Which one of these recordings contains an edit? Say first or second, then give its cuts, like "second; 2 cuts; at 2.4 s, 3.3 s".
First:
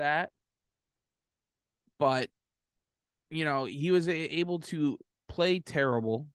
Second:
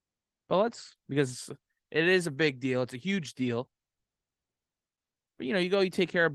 second; 1 cut; at 1.1 s